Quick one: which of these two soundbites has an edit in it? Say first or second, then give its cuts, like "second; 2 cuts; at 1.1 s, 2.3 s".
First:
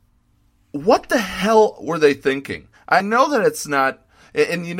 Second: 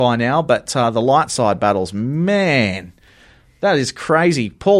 first; 1 cut; at 3.0 s